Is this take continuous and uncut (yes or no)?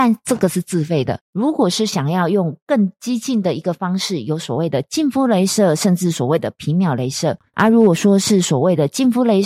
no